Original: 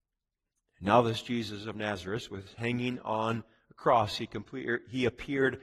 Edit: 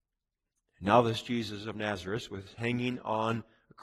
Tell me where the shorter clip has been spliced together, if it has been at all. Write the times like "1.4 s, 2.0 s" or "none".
none